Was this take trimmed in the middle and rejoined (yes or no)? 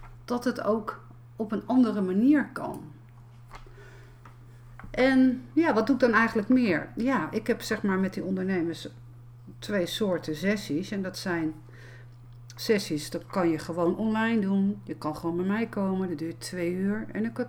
no